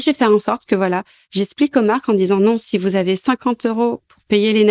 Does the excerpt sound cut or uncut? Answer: uncut